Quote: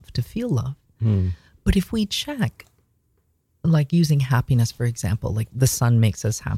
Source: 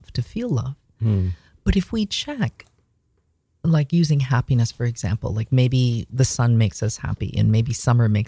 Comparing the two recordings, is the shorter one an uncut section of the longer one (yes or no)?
no